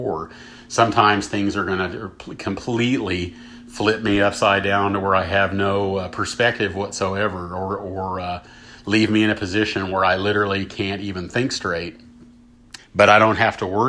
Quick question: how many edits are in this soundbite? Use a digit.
1